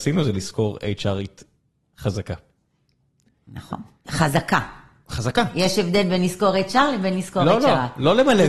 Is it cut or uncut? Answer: cut